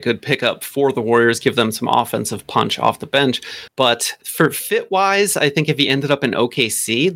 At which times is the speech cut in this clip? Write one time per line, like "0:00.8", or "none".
0:03.7